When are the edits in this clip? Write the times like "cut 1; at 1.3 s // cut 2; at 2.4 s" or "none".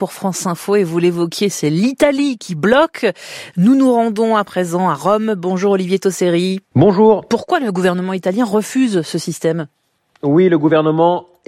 none